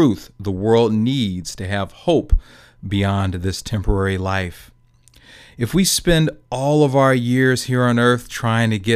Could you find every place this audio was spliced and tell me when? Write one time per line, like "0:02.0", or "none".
none